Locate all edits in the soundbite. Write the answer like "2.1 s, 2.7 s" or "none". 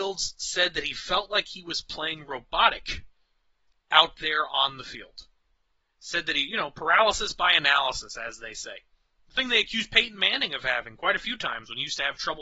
5.8 s